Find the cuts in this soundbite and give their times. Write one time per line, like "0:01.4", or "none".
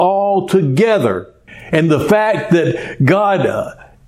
none

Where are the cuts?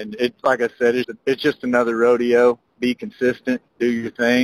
0:01.0

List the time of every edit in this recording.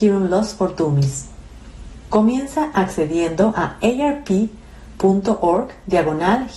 0:02.1

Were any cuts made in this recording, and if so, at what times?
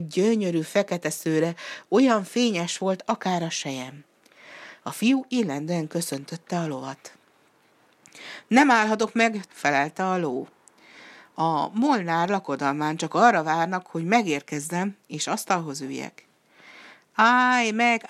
0:09.5

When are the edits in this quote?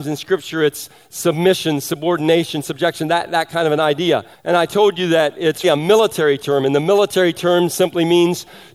0:04.3
0:05.6

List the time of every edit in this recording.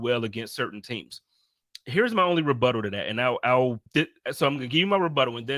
0:03.9

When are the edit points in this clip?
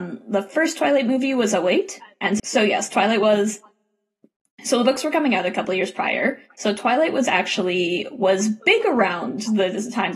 0:02.4

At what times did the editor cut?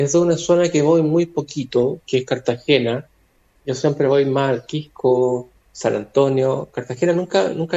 none

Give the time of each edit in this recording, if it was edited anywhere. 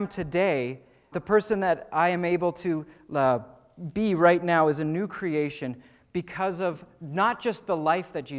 0:01.1

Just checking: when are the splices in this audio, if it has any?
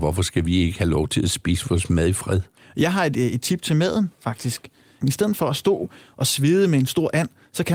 0:05.0

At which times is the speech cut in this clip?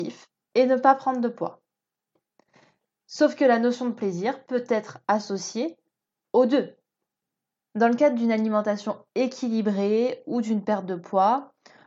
none

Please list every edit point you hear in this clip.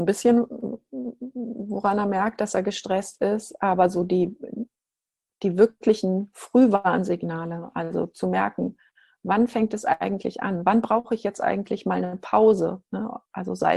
none

